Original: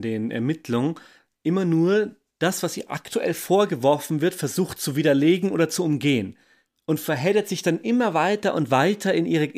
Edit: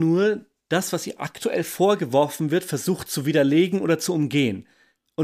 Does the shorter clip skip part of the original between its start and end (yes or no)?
no